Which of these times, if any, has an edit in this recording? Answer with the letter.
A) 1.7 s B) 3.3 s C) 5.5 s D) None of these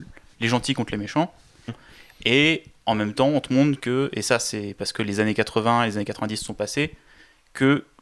A